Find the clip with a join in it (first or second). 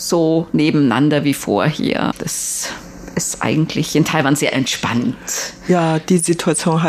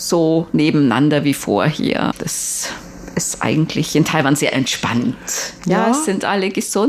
second